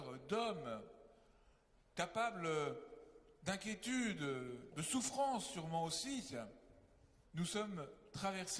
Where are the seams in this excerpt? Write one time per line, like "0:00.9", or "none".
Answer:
0:04.7
0:07.2